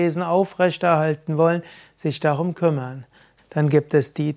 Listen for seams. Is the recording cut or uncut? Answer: cut